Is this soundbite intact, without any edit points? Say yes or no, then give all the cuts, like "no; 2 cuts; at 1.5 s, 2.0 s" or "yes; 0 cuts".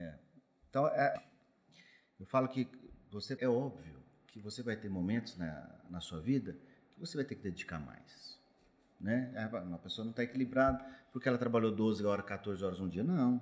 no; 2 cuts; at 1.2 s, 3.4 s